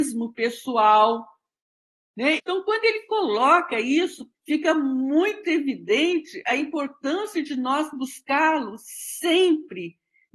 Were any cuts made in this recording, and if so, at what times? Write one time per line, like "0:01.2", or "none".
0:02.4
0:04.3